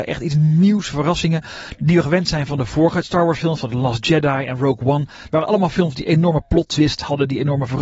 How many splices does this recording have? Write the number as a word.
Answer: zero